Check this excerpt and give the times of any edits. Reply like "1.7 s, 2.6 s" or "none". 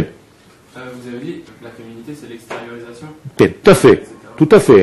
1.5 s, 3.6 s